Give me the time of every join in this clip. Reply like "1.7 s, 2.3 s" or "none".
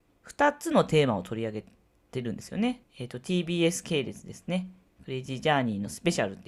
2.8 s